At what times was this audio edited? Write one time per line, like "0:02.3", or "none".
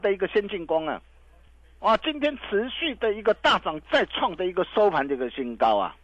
none